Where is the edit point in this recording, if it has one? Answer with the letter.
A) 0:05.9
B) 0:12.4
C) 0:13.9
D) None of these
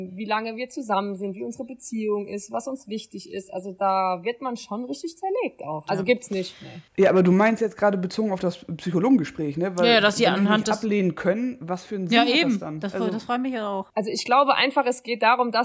A